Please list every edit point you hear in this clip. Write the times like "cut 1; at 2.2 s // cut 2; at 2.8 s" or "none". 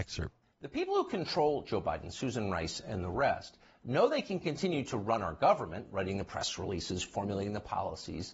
none